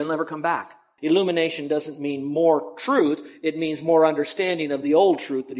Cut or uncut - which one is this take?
cut